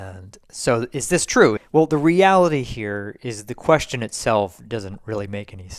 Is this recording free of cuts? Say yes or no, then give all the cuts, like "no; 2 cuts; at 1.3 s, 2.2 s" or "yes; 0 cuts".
no; 1 cut; at 1.6 s